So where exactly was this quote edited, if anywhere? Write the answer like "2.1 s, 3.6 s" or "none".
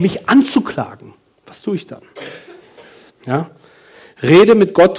3.1 s